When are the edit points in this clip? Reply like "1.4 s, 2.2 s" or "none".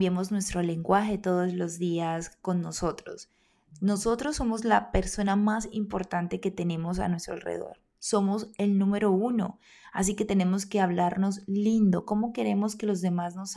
none